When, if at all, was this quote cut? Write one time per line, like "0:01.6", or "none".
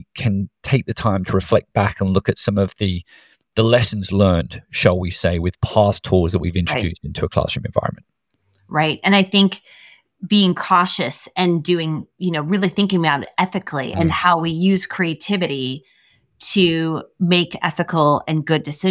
0:13.9